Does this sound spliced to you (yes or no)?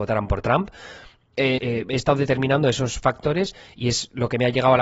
yes